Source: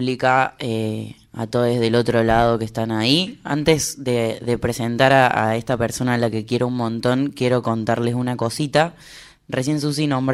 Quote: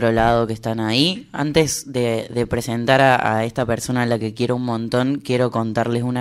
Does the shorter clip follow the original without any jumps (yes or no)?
yes